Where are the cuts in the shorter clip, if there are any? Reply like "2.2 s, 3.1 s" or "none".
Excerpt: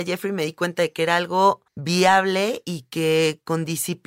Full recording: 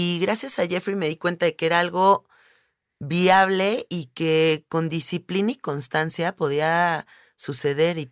1.7 s